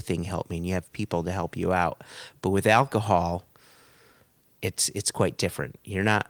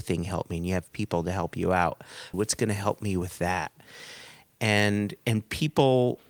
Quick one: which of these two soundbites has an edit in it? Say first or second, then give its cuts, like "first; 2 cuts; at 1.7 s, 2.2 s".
second; 1 cut; at 2.3 s